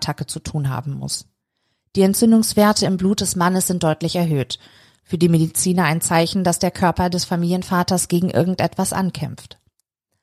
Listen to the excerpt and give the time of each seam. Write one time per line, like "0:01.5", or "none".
none